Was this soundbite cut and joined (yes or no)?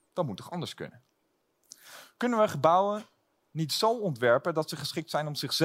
no